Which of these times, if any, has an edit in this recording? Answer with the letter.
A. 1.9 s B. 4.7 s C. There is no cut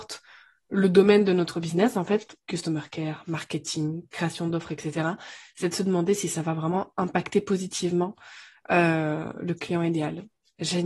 C